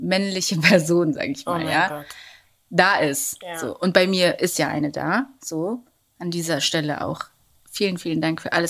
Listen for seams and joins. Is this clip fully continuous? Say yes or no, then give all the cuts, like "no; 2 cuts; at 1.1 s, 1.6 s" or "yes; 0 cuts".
yes; 0 cuts